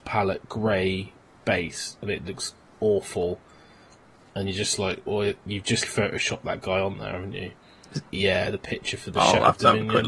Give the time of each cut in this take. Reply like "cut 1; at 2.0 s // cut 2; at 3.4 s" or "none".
cut 1; at 5.8 s // cut 2; at 8.1 s

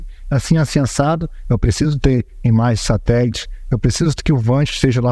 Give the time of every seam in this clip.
cut 1; at 1.4 s

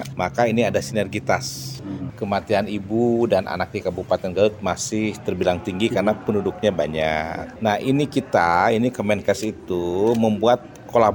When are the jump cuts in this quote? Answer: cut 1; at 2.1 s

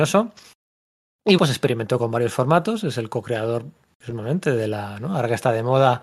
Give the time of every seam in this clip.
cut 1; at 1.4 s

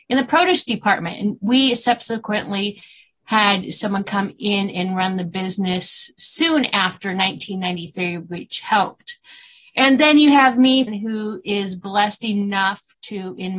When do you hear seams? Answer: cut 1; at 10.9 s

